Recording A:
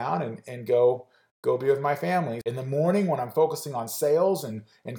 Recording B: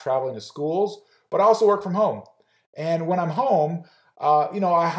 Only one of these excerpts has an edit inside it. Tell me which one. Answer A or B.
A